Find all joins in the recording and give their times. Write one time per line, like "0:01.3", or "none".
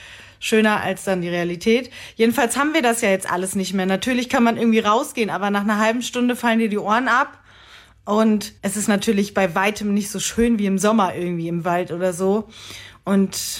0:08.6